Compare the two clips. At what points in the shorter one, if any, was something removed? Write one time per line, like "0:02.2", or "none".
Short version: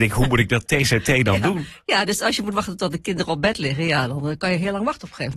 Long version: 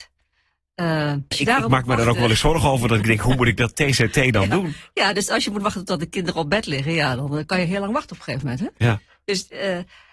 none